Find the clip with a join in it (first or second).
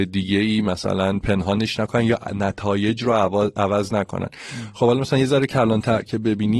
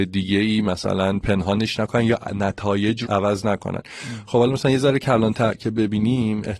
second